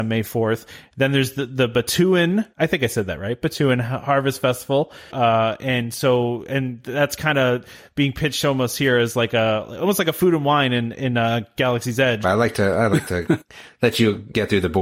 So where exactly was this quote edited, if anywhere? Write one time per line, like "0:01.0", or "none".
0:02.5
0:05.1
0:12.2